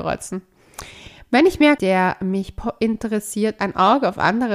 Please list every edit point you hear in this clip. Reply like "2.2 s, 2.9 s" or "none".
1.8 s